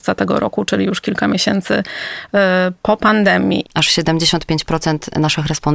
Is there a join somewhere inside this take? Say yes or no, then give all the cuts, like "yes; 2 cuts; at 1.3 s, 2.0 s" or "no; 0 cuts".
yes; 1 cut; at 3.6 s